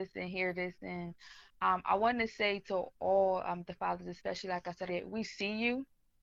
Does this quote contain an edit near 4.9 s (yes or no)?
yes